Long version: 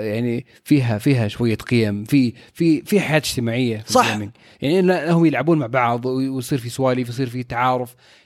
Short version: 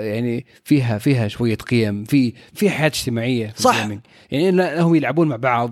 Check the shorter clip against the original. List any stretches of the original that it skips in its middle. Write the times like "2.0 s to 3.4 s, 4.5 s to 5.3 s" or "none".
2.5 s to 2.8 s